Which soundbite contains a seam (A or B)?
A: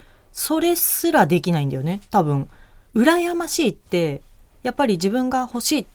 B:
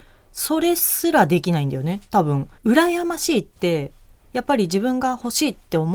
B